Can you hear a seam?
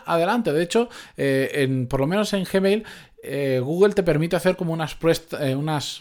no; 0 cuts

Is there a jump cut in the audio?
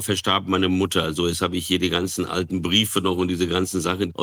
no; 0 cuts

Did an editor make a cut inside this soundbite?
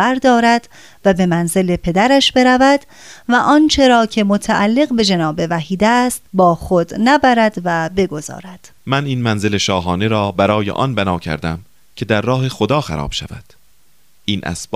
yes; 2 cuts; at 6.3 s, 8.8 s

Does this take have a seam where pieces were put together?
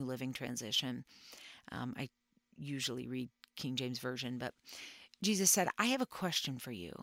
no; 0 cuts

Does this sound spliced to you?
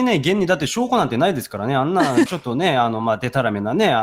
yes; 1 cut; at 2.3 s

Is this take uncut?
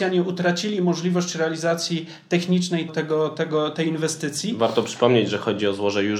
no; 1 cut; at 2.9 s

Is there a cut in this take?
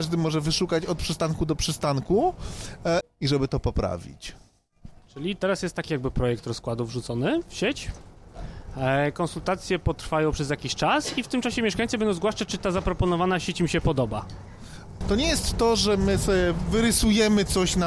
yes; 2 cuts; at 3.0 s, 15.0 s

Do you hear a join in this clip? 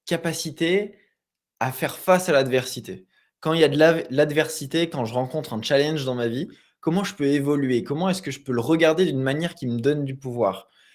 no; 0 cuts

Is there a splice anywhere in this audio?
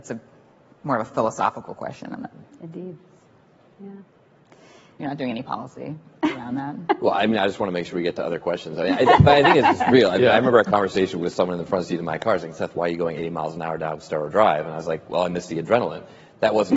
no; 0 cuts

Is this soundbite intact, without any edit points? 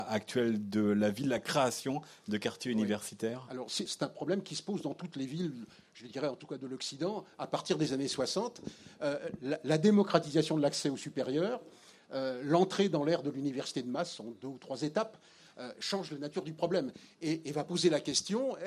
no; 1 cut; at 3.9 s

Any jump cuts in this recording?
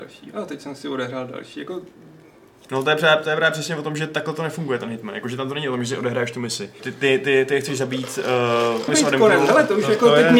yes; 2 cuts; at 6.8 s, 8.9 s

